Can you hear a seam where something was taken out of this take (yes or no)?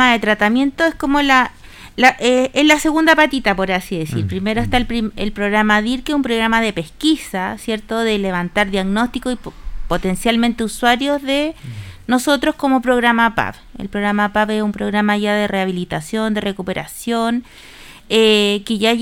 no